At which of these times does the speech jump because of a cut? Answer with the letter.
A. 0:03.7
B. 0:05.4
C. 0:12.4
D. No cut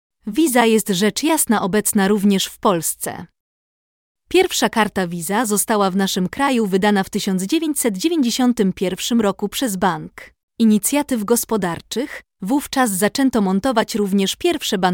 C